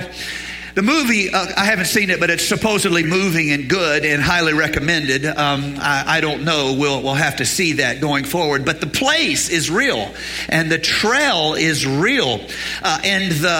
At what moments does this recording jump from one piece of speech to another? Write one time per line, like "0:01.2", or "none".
0:03.0